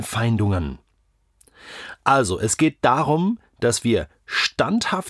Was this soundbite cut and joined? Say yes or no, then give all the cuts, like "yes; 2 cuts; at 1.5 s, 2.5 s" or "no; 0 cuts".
no; 0 cuts